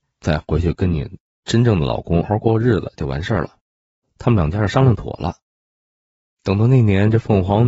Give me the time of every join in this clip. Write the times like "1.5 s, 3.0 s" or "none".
2.2 s, 4.0 s

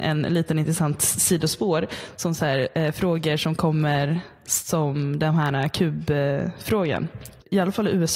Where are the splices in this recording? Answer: none

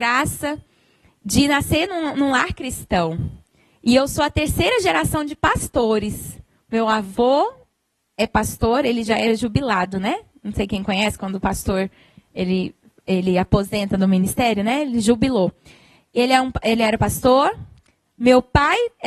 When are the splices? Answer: none

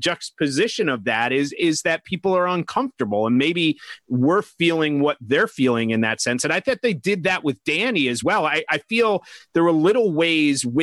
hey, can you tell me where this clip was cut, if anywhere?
none

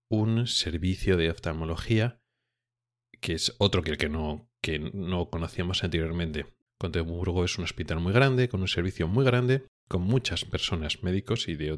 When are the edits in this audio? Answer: 6.7 s

